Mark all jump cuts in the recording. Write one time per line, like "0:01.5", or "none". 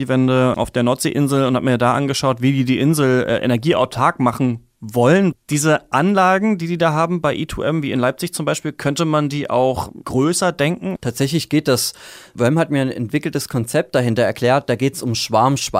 none

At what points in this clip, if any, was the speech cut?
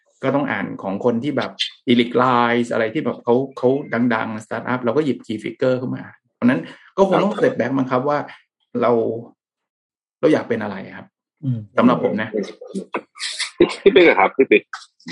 none

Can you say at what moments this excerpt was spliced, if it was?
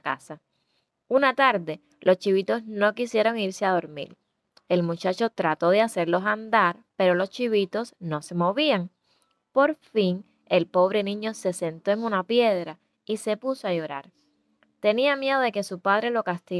none

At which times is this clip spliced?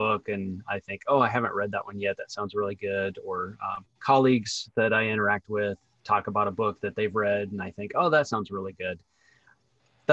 none

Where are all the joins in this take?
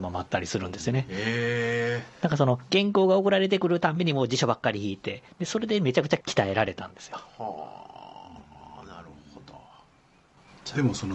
none

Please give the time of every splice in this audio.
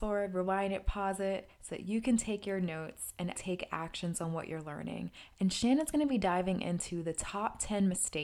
0:03.3

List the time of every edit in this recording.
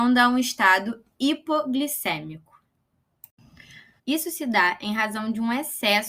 0:04.0

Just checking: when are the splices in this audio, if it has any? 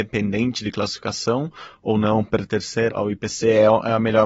0:02.9

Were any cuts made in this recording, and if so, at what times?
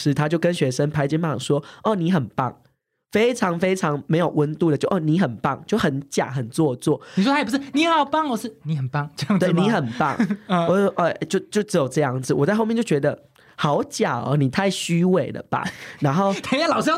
none

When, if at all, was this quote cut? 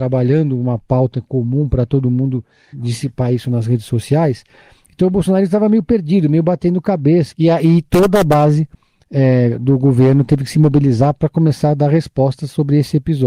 0:07.3

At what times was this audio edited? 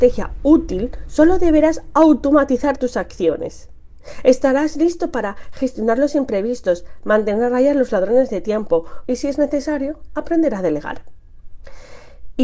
0:09.1

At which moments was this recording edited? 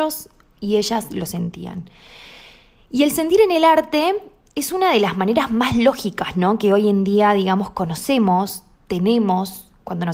none

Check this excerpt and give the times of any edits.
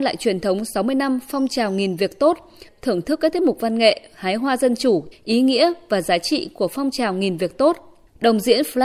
0:02.7
0:05.1

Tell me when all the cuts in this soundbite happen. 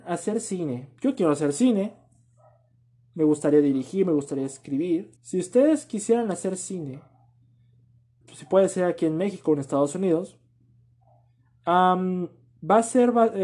0:05.2
0:08.2

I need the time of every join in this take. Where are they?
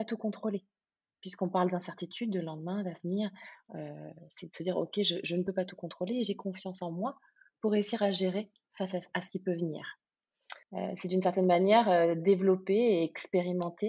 0:10.6

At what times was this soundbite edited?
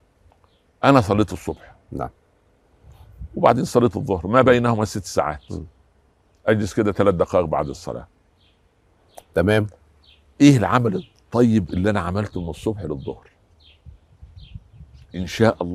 none

